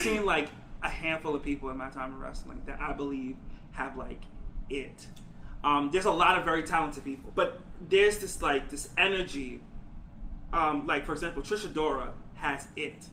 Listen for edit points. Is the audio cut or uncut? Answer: cut